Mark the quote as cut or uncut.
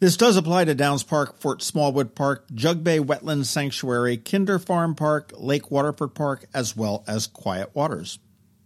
uncut